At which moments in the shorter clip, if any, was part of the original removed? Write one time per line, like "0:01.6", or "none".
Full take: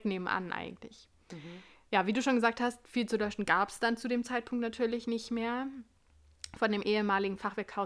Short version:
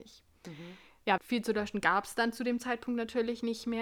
0:01.2